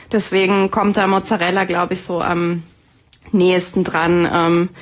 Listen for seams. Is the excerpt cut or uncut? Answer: uncut